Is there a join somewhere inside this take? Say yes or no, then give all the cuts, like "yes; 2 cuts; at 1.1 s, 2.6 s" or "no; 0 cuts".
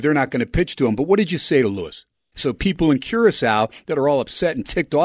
yes; 1 cut; at 2.3 s